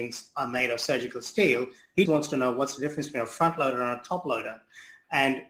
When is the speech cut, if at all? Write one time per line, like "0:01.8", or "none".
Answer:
0:02.0